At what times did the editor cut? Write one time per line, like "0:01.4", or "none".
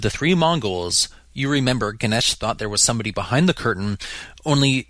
none